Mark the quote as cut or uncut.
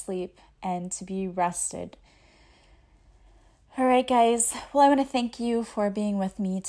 uncut